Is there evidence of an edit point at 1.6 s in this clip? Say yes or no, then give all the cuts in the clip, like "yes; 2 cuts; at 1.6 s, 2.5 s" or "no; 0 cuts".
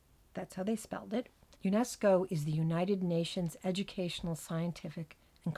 yes; 1 cut; at 1.6 s